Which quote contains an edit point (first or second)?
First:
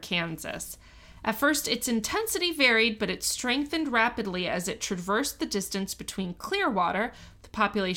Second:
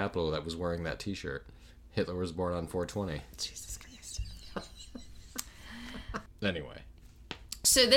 second